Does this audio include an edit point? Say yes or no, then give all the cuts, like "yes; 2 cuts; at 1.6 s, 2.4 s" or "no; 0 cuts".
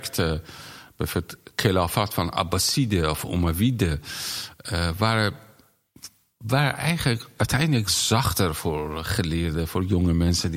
no; 0 cuts